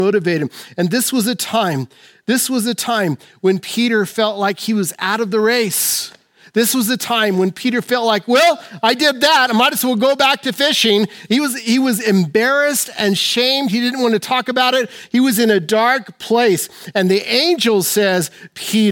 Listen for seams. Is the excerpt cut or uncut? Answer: uncut